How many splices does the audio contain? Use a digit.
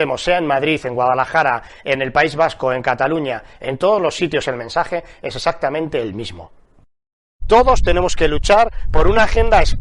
1